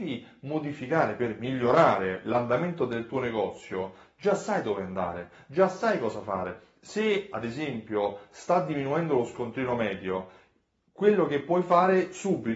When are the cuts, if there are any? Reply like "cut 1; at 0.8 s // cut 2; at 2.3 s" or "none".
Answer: none